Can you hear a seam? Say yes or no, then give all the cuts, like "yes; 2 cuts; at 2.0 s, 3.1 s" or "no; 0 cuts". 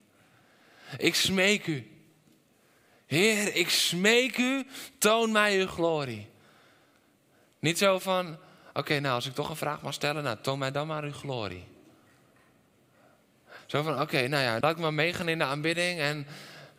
yes; 2 cuts; at 13.6 s, 14.6 s